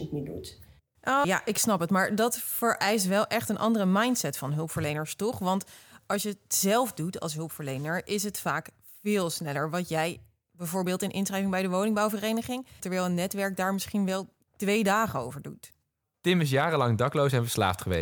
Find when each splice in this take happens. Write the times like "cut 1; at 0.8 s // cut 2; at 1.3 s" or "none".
cut 1; at 1.2 s // cut 2; at 12.8 s // cut 3; at 16.0 s